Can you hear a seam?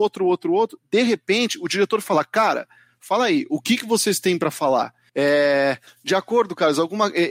yes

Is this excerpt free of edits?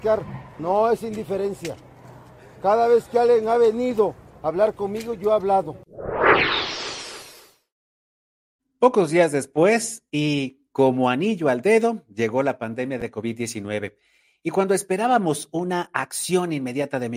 yes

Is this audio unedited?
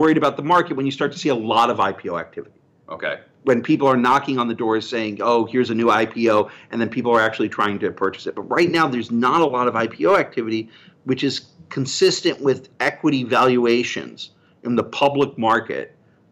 yes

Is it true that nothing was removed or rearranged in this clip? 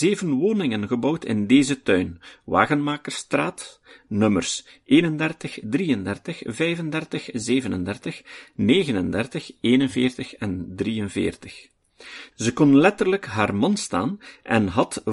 no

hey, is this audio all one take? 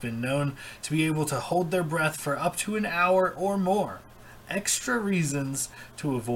yes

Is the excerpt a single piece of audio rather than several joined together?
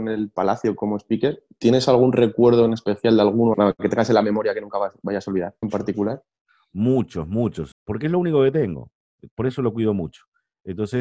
no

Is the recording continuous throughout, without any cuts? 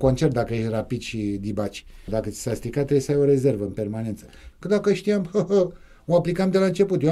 no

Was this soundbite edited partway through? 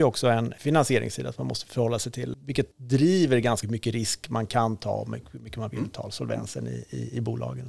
yes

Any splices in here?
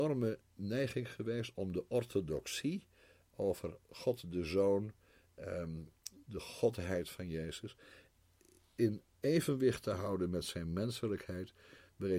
no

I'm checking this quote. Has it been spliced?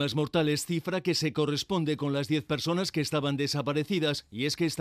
no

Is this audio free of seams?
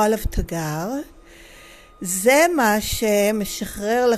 yes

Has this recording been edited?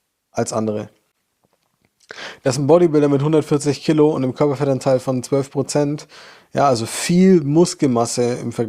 no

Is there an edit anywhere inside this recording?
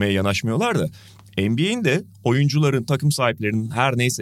no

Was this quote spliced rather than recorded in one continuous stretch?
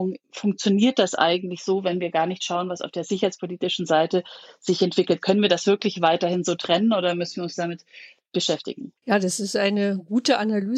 yes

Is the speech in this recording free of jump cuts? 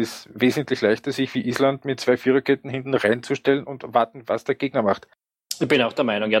yes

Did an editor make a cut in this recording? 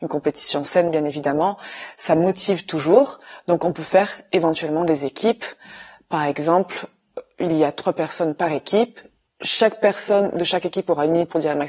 no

